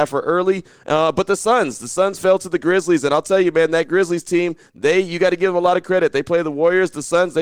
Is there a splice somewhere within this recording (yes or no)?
no